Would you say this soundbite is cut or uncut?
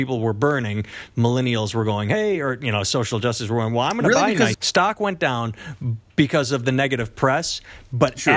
cut